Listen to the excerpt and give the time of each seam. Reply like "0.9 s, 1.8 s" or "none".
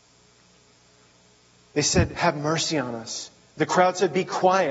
none